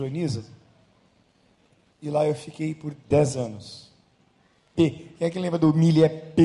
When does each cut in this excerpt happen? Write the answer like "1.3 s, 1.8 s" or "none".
4.7 s